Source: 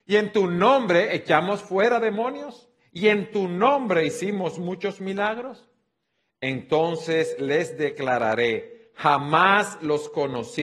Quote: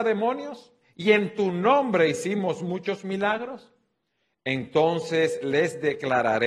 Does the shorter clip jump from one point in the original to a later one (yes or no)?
no